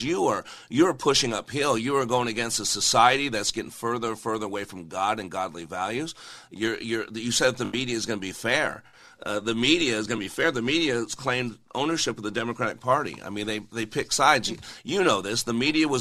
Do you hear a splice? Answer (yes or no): no